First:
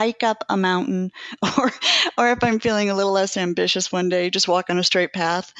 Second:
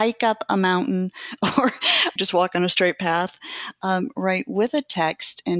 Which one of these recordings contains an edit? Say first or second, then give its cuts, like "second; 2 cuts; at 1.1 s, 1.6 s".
second; 1 cut; at 2.2 s